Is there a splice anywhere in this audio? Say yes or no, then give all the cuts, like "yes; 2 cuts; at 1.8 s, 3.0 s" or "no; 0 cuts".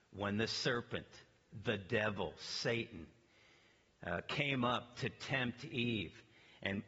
no; 0 cuts